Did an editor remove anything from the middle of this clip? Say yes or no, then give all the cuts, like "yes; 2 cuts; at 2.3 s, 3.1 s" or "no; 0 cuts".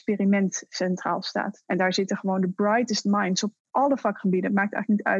yes; 1 cut; at 1.6 s